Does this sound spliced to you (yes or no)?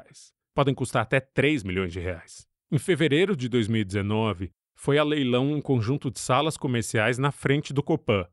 yes